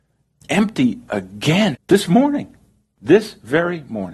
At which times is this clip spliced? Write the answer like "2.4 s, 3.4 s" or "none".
1.7 s